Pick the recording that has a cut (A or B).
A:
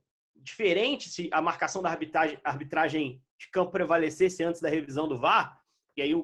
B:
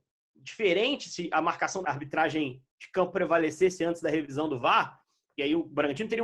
B